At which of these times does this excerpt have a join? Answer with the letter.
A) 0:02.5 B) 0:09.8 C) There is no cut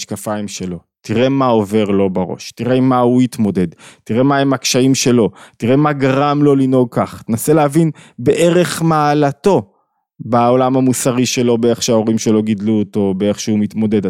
C